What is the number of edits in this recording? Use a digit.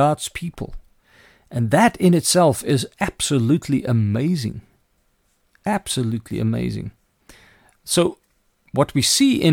0